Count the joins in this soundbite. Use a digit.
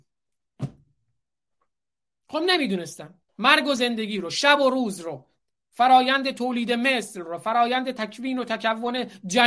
1